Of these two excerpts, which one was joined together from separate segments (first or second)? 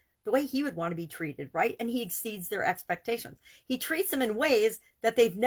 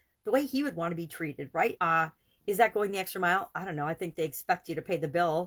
second